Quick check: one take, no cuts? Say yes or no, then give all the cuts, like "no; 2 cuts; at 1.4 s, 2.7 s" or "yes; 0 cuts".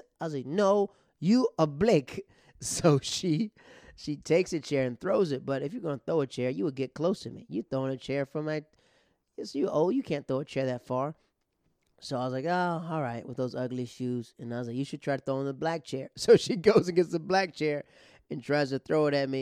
yes; 0 cuts